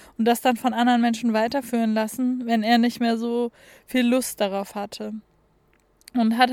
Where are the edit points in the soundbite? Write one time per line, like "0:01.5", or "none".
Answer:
none